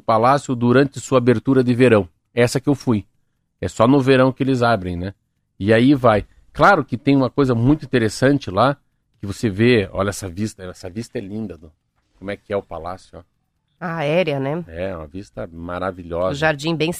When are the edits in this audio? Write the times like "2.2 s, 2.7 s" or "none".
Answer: none